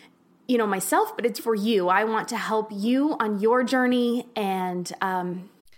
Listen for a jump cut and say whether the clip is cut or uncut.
cut